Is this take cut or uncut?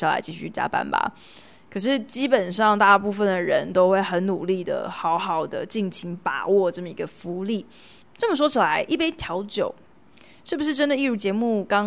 cut